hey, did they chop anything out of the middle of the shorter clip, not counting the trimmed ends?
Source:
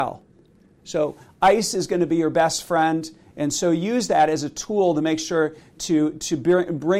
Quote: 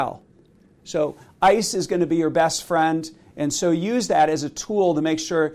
no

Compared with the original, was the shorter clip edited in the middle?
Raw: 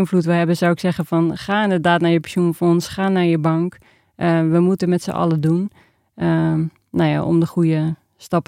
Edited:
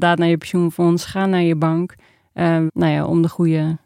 yes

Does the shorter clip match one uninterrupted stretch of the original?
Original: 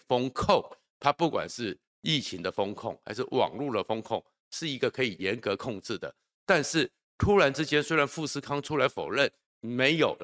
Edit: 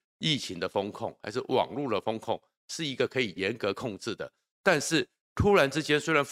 yes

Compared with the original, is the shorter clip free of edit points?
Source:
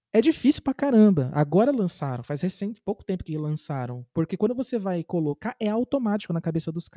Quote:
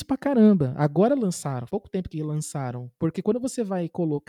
no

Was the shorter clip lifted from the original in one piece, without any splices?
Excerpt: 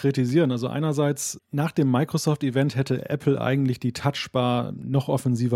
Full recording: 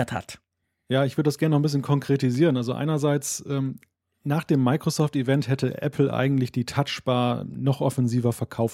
no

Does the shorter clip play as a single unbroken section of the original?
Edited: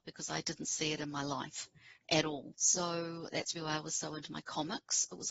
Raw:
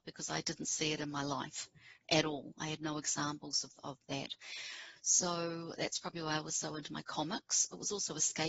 no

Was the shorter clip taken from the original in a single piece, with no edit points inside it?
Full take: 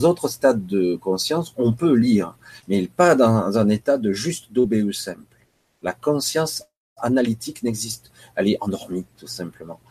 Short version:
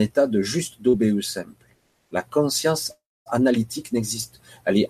yes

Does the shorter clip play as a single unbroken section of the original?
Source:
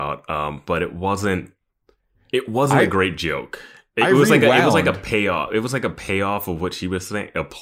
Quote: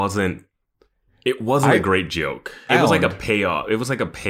no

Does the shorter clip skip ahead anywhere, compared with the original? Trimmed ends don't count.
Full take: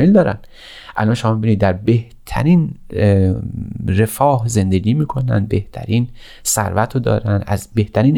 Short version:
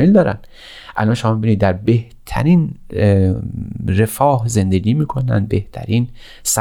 no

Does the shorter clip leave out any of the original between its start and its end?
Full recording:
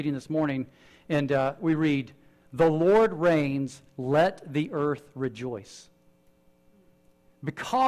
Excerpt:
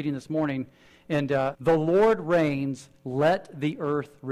yes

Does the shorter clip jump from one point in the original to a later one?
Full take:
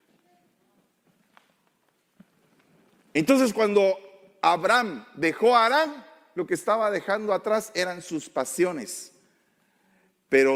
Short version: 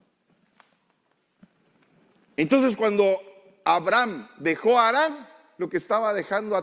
no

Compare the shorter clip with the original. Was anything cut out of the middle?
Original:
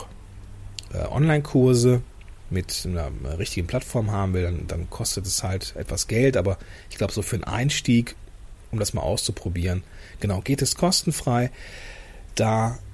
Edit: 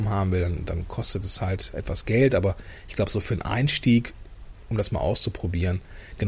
no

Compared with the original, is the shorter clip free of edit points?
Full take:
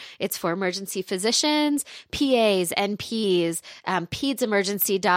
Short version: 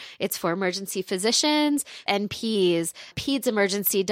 no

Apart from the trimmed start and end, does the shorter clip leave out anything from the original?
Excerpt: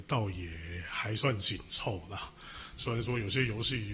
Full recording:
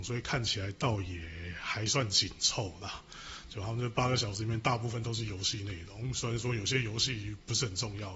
yes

